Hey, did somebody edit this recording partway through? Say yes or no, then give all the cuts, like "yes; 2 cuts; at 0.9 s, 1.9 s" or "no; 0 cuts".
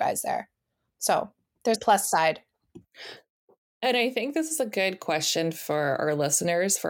yes; 1 cut; at 1.7 s